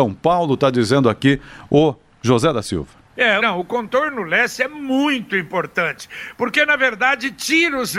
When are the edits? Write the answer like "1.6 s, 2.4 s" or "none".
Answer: 3.4 s